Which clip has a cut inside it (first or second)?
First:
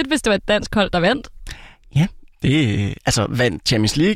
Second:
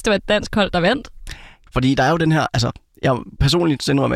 second